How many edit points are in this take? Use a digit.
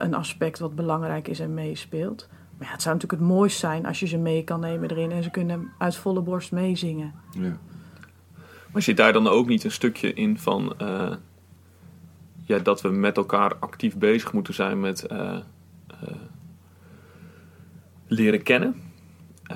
0